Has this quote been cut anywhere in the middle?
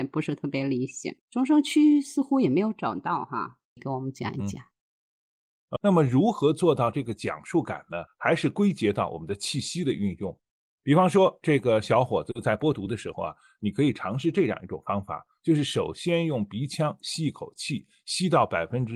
yes; 3 cuts; at 1.2 s, 3.8 s, 5.8 s

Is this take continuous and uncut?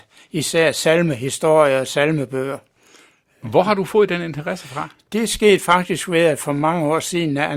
yes; 0 cuts

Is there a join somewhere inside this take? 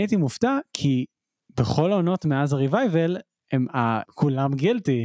yes; 1 cut; at 4.0 s

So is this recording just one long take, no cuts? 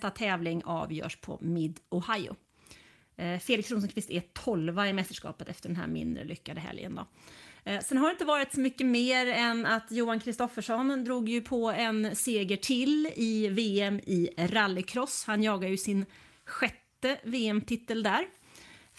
yes; 0 cuts

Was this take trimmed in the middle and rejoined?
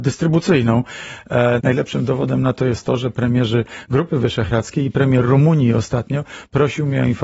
yes; 1 cut; at 1.6 s

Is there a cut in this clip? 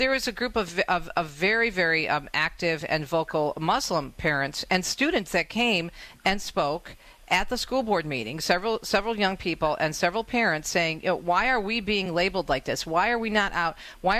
no; 0 cuts

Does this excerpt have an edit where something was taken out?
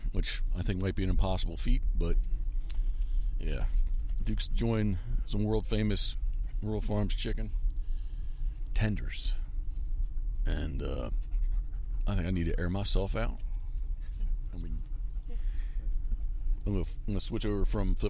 no; 0 cuts

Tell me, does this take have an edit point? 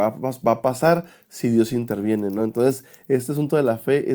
no; 0 cuts

